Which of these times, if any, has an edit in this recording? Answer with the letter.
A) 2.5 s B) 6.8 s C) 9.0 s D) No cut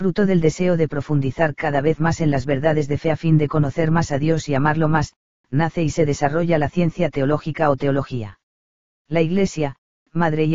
C